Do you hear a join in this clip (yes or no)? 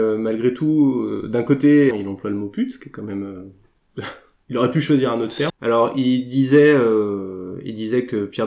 yes